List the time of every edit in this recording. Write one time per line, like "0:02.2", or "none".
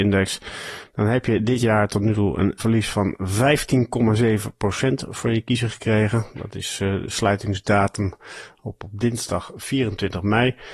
none